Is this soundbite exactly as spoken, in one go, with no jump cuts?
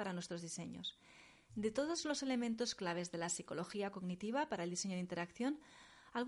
no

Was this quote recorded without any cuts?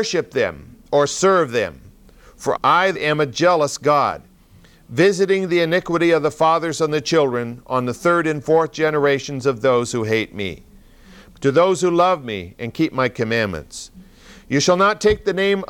no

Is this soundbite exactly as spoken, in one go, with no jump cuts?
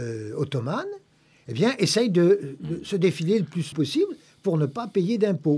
no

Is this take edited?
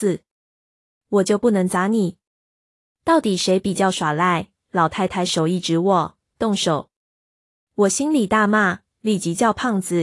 no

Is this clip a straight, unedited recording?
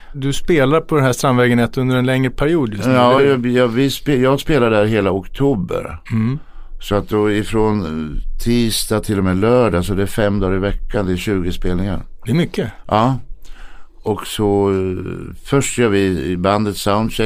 yes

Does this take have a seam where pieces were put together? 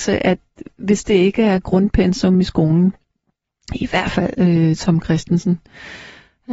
no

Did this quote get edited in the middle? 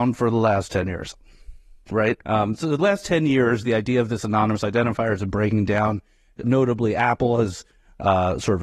yes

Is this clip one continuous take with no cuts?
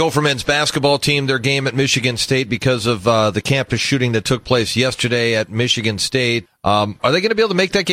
no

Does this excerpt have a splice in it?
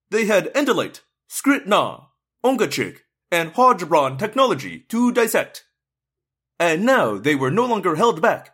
no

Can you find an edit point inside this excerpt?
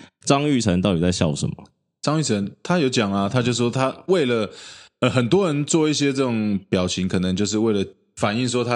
no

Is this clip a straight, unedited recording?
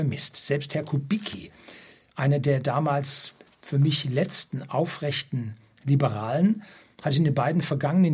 yes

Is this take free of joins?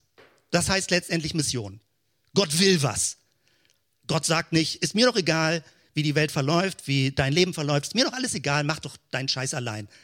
yes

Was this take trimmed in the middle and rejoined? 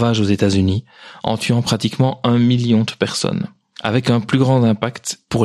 no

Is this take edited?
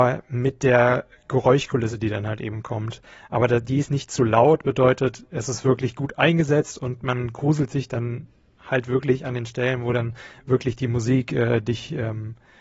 no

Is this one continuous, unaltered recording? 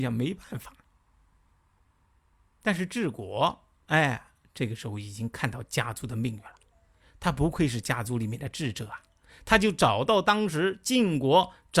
yes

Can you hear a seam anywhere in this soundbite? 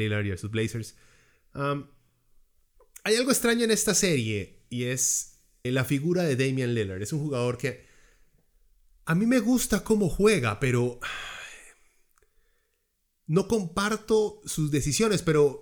yes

